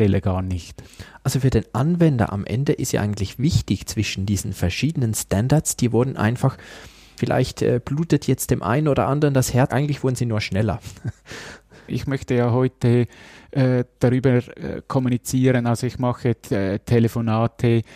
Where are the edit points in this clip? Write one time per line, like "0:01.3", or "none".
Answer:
0:07.2
0:09.7
0:11.9